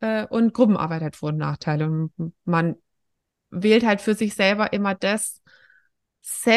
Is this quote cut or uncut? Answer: uncut